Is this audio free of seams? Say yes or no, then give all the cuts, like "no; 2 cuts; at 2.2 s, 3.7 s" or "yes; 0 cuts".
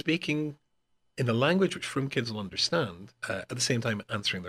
no; 1 cut; at 3.2 s